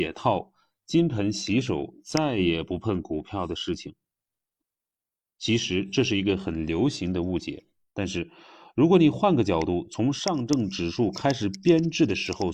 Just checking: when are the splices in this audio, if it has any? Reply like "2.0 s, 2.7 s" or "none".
5.2 s, 7.8 s